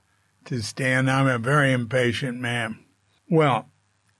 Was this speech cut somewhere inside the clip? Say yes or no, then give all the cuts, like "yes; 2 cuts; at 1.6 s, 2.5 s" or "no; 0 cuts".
no; 0 cuts